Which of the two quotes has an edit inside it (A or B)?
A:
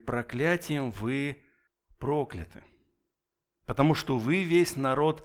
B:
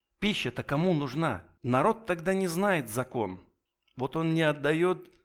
B